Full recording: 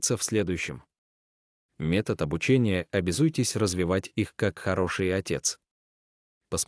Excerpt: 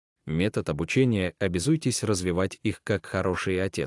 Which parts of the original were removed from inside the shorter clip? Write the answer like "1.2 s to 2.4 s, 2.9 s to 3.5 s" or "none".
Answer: none